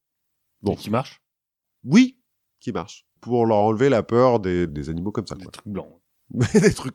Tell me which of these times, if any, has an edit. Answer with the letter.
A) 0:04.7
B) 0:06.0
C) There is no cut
A